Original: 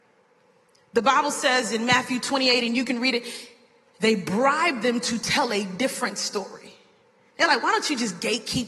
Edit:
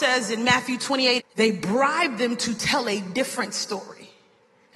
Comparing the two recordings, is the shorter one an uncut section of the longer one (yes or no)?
no